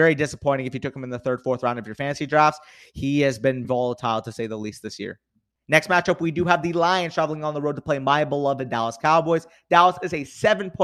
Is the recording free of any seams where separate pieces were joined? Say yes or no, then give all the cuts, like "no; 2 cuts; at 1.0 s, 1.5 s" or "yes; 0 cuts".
no; 1 cut; at 3.6 s